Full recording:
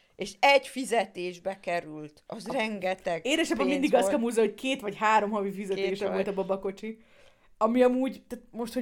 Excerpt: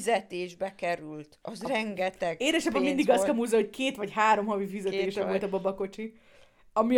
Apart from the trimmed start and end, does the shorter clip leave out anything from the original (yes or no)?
no